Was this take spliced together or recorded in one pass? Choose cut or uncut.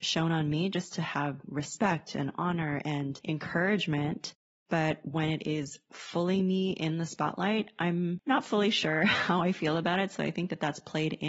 cut